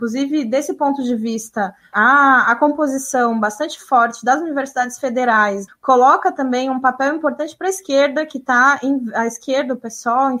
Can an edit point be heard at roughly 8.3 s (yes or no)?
no